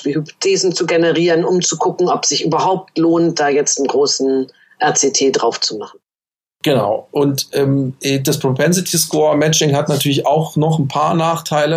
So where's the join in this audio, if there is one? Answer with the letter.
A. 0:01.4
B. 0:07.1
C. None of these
C